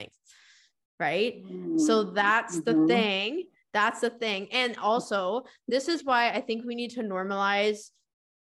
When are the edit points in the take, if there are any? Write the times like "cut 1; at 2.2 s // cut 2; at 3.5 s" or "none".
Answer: none